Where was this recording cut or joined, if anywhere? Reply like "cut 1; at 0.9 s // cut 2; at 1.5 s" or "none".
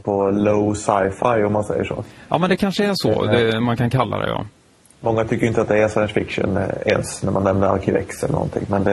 none

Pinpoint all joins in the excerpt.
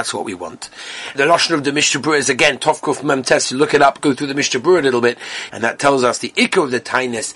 cut 1; at 1.2 s // cut 2; at 5.5 s

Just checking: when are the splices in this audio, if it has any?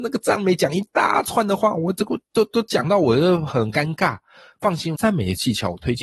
cut 1; at 2.2 s // cut 2; at 4.9 s

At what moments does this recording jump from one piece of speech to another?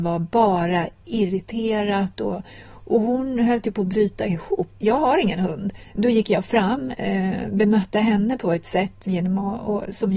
cut 1; at 4.8 s // cut 2; at 5.9 s

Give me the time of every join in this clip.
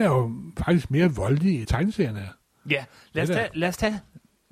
cut 1; at 1.6 s

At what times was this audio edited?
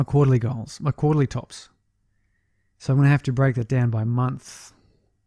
none

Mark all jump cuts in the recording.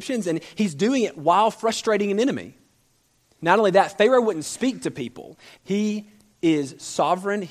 cut 1; at 3.4 s // cut 2; at 5.6 s

